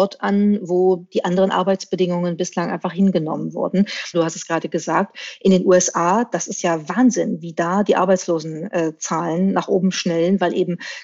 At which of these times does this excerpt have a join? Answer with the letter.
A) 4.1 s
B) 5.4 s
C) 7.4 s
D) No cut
A